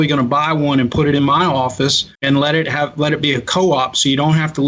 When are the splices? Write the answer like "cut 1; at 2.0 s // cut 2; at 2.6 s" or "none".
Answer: cut 1; at 2.1 s